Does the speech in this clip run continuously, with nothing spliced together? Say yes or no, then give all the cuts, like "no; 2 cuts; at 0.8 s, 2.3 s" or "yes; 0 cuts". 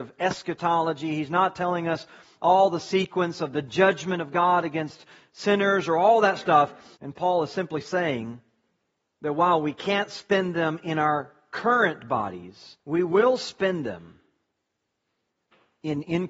no; 2 cuts; at 6.9 s, 12.8 s